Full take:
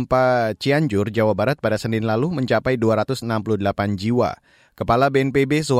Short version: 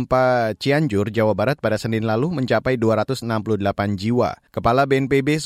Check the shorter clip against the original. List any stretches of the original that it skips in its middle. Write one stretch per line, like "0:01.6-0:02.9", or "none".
0:04.5-0:04.7